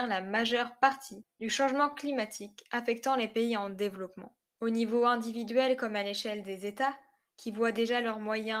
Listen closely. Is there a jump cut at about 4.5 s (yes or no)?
yes